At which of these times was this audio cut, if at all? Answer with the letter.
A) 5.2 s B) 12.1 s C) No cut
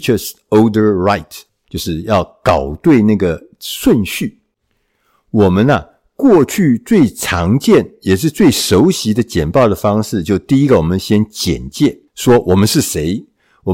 B